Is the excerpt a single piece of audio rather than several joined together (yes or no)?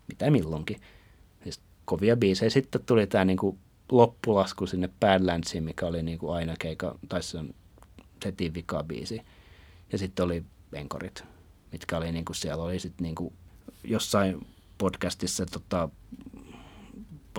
yes